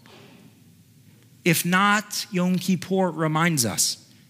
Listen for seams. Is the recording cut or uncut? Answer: uncut